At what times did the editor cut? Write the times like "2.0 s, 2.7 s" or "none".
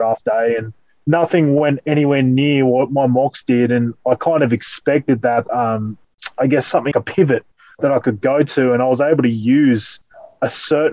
5.5 s, 6.9 s